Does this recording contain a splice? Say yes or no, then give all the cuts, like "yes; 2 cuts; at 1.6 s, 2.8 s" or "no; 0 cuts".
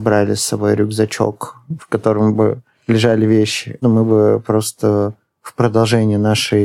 yes; 2 cuts; at 1.8 s, 3.8 s